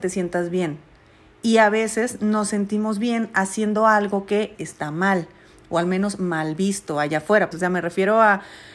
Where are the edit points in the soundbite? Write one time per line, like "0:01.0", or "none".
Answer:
0:04.5
0:07.5